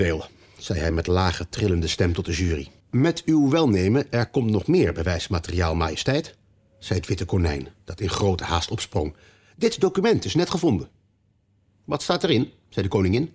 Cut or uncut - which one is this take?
cut